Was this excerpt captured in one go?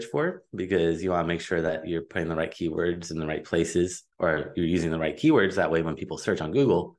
yes; 0 cuts

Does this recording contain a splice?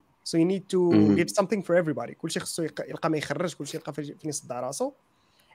no; 0 cuts

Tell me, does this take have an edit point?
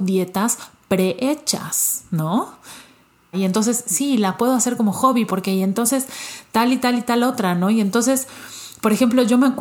yes; 2 cuts; at 3.3 s, 5.3 s

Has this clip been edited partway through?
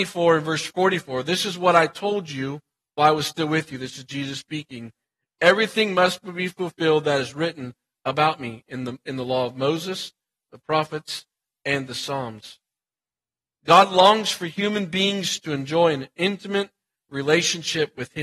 no; 0 cuts

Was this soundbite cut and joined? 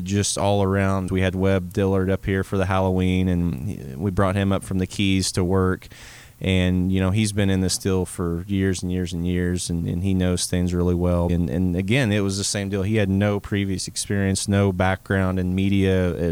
yes; 2 cuts; at 1.1 s, 11.3 s

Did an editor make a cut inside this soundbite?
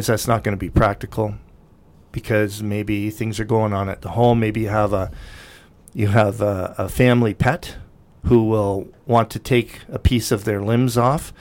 no; 0 cuts

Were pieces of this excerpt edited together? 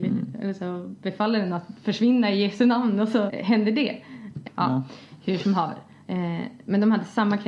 yes; 3 cuts; at 3.3 s, 4.4 s, 6.0 s

